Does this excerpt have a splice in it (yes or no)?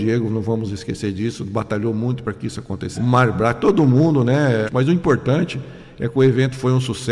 yes